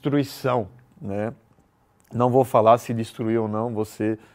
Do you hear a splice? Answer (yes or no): no